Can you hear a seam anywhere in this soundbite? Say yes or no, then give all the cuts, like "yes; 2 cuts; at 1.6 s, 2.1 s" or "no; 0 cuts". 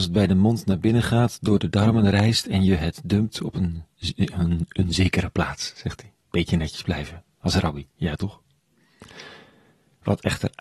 no; 0 cuts